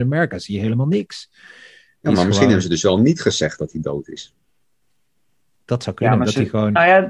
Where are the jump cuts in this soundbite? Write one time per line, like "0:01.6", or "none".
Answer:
none